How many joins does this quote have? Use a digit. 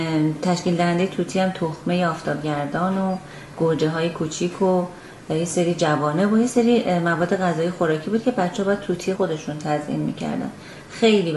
1